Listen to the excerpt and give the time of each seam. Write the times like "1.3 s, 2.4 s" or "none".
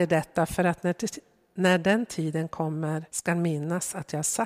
3.1 s

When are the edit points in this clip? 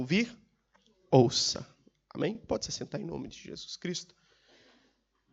none

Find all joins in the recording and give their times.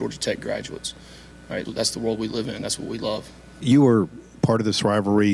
1.7 s

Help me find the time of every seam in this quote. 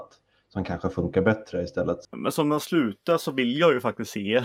2.0 s

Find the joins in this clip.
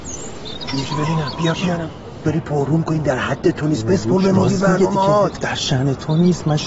2.2 s

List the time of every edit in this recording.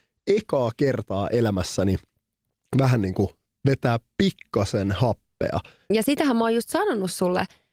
none

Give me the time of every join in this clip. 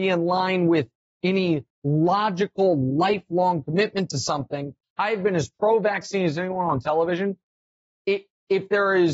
4.8 s

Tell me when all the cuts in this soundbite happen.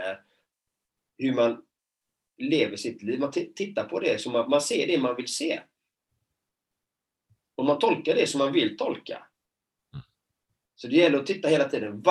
none

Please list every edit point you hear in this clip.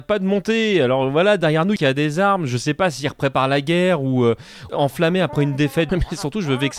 1.8 s, 4.7 s, 5.9 s

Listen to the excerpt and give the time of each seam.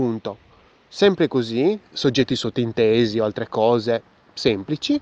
1.8 s

